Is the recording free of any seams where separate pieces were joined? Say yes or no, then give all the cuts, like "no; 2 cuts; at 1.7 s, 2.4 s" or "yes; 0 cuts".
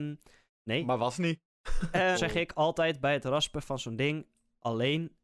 no; 1 cut; at 2.1 s